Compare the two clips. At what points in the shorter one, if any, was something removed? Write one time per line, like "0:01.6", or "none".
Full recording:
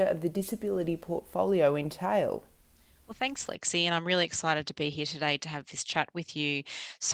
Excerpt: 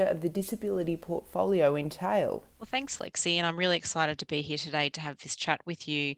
0:02.5